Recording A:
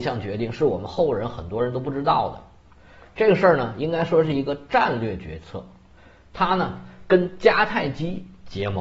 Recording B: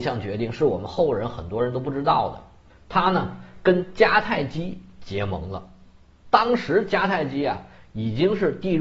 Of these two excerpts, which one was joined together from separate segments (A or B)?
B